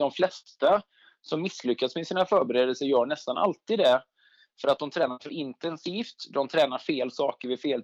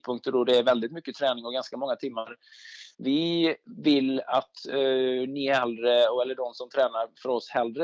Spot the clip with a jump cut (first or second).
second